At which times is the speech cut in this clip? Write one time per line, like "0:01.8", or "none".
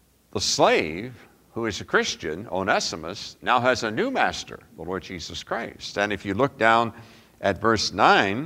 none